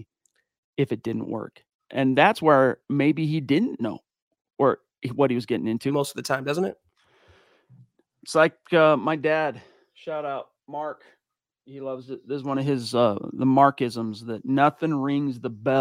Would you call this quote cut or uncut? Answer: cut